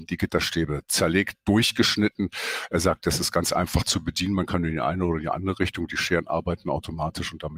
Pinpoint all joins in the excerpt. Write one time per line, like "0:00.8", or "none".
none